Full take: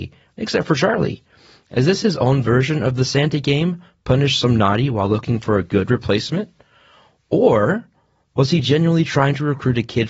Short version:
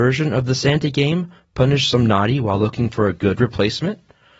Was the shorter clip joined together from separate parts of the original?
no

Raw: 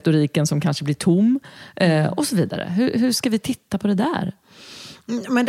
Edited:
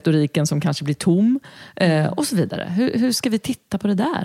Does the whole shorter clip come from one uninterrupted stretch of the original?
yes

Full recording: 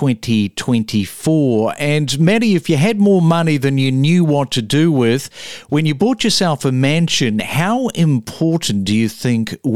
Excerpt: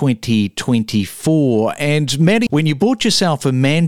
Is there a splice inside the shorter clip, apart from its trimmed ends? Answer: yes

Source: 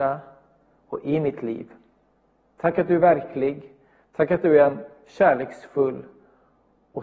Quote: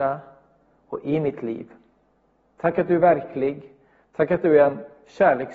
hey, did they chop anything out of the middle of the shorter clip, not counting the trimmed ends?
no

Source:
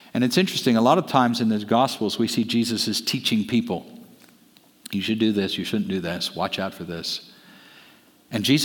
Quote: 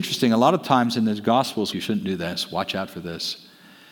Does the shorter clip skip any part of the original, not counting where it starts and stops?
yes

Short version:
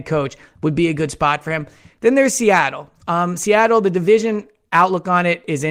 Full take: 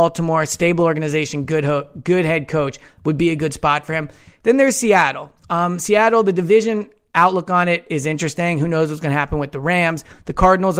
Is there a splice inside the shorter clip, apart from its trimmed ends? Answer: no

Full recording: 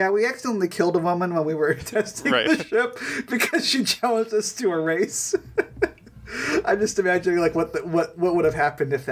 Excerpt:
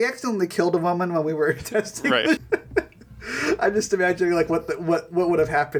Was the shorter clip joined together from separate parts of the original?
yes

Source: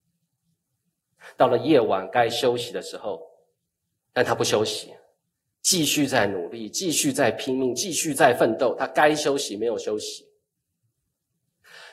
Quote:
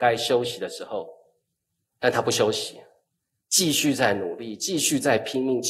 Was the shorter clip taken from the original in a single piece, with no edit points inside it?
yes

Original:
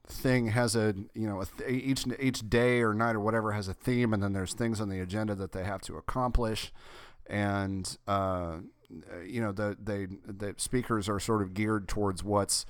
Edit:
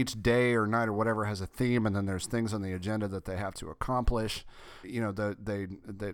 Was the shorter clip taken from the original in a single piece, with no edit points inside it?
no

